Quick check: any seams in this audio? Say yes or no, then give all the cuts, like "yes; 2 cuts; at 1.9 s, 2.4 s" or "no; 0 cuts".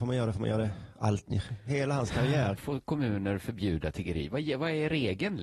yes; 1 cut; at 2.6 s